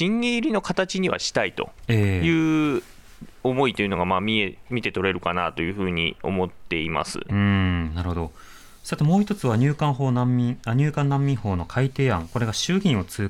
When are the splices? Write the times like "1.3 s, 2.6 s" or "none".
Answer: 7.3 s